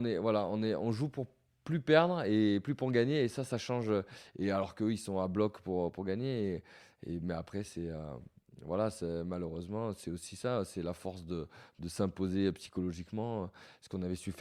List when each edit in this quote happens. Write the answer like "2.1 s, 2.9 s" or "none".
none